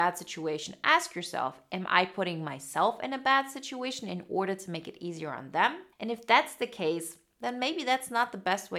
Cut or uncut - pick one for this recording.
cut